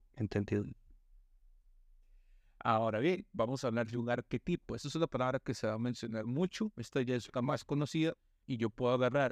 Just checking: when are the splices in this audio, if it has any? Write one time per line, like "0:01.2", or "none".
0:08.4